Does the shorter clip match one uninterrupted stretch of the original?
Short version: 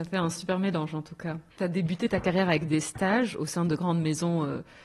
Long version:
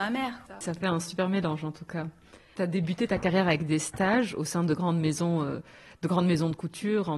no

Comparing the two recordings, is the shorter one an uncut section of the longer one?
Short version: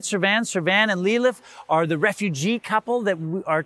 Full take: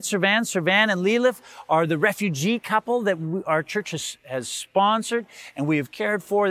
yes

